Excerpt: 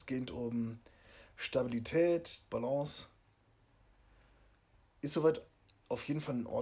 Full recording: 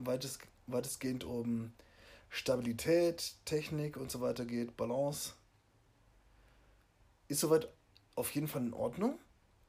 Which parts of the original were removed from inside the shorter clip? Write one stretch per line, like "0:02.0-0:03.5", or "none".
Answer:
0:03.4-0:04.8